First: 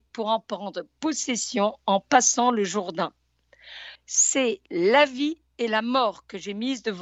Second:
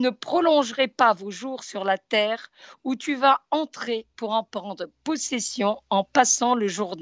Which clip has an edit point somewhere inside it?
first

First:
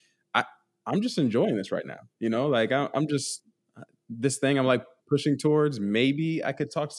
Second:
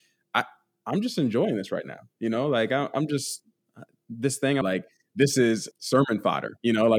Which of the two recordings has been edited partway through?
second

